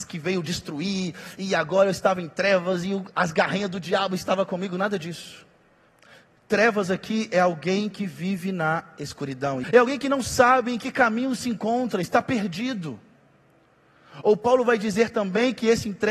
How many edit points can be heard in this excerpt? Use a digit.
2